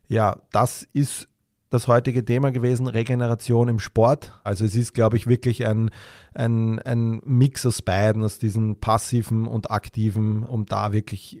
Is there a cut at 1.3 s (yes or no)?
no